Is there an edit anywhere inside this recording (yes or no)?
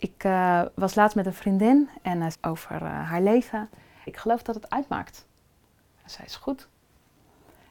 yes